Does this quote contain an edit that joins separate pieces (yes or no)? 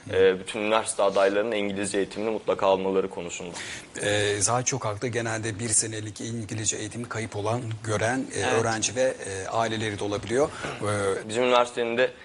yes